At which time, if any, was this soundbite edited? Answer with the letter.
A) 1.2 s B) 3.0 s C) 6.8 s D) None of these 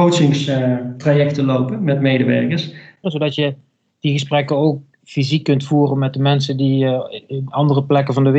B